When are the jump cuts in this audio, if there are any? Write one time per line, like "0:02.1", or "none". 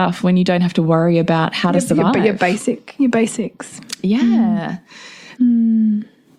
0:05.4